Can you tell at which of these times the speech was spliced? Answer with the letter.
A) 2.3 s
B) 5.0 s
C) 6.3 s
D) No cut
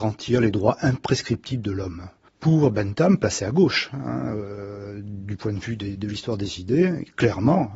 A